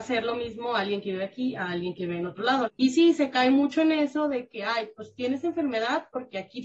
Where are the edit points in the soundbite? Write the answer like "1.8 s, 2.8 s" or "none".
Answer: 2.7 s